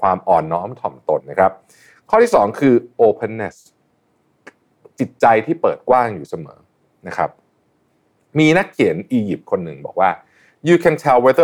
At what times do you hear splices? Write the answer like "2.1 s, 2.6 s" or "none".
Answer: 1.2 s